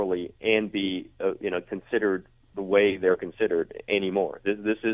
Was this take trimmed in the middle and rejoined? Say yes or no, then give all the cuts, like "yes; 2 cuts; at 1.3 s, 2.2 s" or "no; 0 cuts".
no; 0 cuts